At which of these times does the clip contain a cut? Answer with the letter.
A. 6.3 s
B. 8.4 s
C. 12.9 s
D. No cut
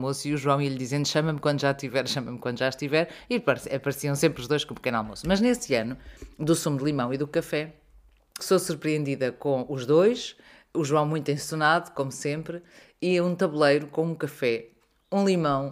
B